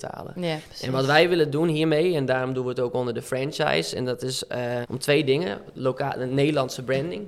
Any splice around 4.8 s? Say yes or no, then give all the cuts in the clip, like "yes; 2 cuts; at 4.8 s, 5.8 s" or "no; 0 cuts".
yes; 1 cut; at 4.8 s